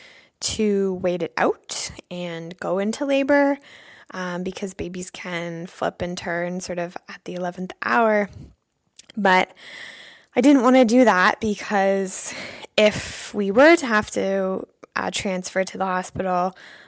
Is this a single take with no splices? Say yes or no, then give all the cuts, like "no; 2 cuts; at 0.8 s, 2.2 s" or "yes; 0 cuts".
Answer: yes; 0 cuts